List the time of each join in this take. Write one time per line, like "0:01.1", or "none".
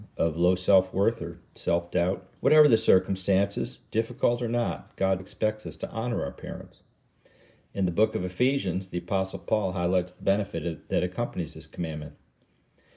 0:02.4
0:05.2